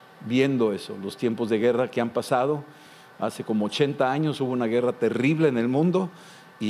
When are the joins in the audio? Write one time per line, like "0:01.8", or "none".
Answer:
none

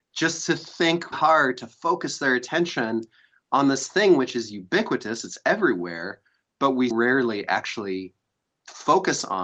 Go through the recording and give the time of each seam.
0:01.1
0:06.9

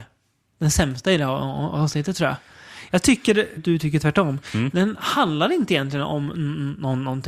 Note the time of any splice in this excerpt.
0:03.6
0:04.7

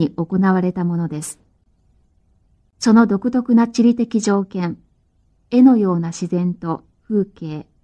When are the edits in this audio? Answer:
0:05.3

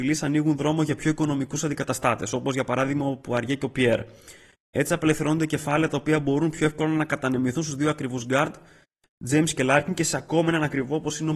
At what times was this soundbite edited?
none

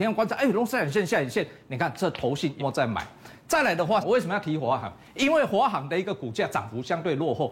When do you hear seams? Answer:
0:02.6
0:04.0

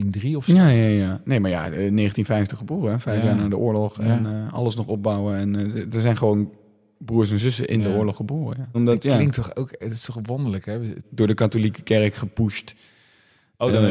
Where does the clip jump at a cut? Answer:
0:08.7
0:11.0

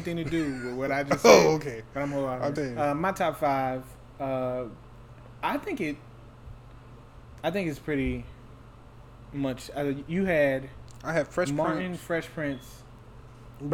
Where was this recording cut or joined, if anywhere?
0:02.6

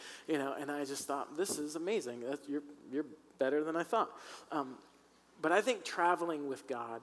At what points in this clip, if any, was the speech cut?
none

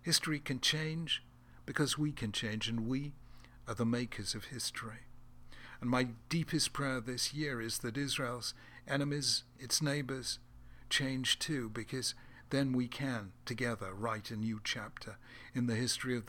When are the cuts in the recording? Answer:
none

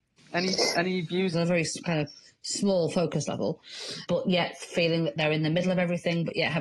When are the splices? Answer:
0:01.3
0:04.1

